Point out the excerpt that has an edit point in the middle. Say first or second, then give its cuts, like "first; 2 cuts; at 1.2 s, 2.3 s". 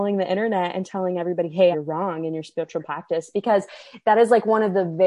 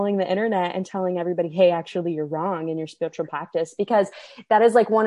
first; 1 cut; at 1.7 s